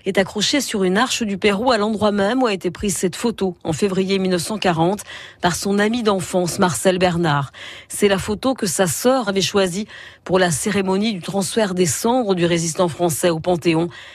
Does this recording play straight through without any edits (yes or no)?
no